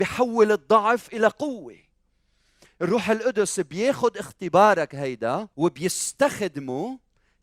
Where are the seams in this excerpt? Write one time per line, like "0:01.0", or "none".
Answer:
0:05.5

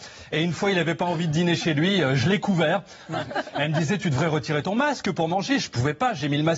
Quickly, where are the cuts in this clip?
0:03.1

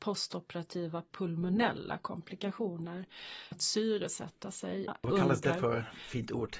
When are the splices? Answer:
0:03.5
0:04.9

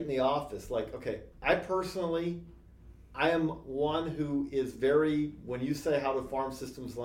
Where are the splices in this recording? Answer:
none

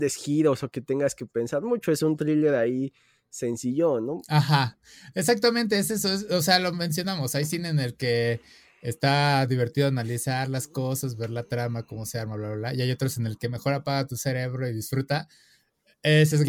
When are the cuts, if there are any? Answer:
none

